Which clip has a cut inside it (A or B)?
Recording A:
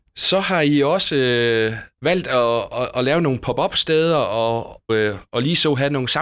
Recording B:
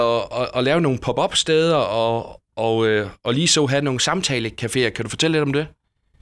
A